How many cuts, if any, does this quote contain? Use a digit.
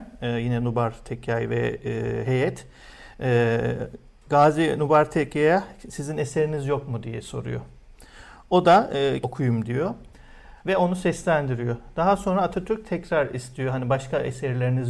2